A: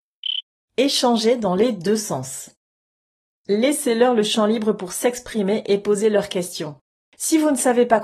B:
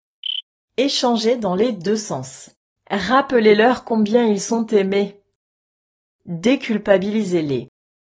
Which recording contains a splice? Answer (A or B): B